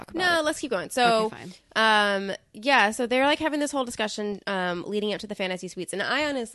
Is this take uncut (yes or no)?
yes